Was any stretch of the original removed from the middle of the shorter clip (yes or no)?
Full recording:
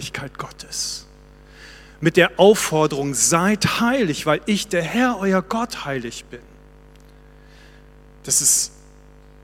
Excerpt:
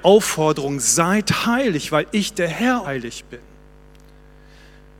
yes